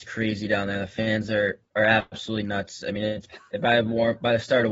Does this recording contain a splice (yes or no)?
no